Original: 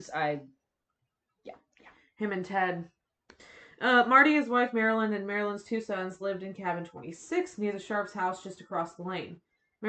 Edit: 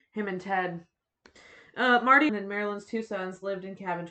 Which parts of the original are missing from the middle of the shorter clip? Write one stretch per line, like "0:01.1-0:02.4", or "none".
0:04.3-0:05.1